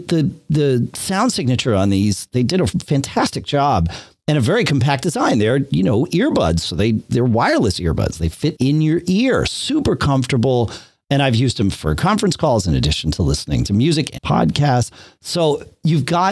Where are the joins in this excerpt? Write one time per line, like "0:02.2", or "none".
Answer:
0:08.6
0:14.2